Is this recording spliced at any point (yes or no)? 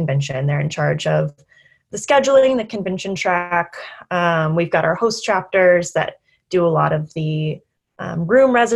no